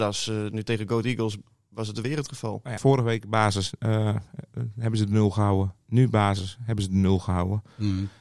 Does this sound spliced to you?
yes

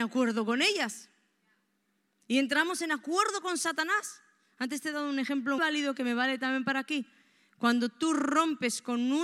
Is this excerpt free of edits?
no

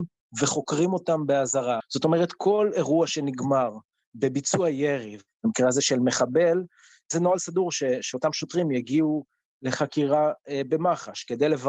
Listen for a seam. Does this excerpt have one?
yes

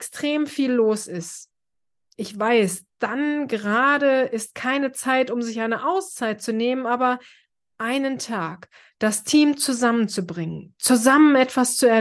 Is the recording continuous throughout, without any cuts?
yes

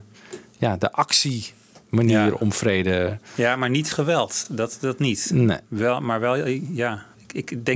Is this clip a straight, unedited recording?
yes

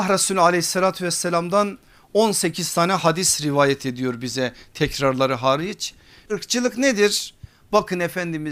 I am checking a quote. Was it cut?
yes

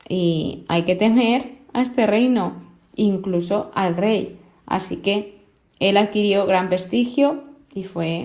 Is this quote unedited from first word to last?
yes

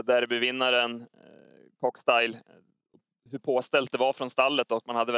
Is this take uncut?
yes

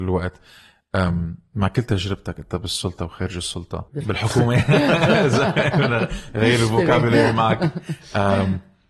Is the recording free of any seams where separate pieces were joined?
no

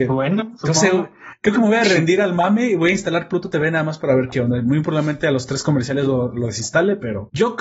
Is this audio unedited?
yes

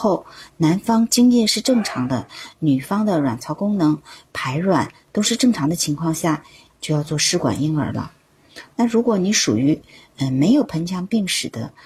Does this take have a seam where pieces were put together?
yes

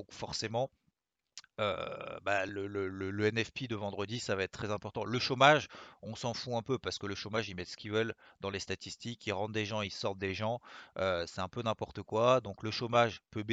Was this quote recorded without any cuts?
yes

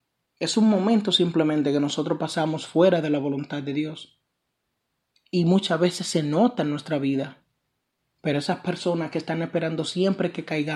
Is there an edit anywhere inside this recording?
no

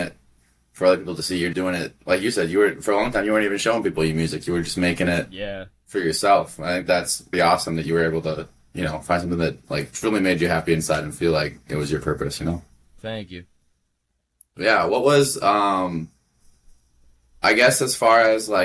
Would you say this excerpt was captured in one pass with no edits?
no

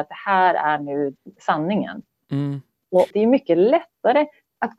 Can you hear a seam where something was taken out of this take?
no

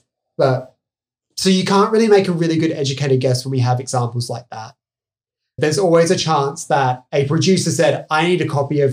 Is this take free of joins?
no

